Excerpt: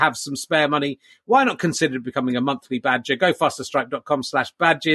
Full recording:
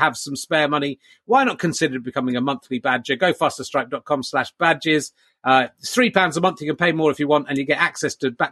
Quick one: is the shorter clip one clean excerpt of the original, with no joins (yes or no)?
yes